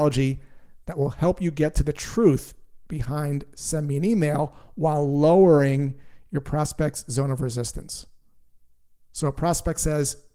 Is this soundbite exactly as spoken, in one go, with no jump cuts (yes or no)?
yes